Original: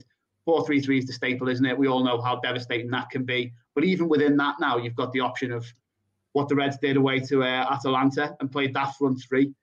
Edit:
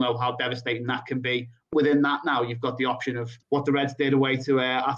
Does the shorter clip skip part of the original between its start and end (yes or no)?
yes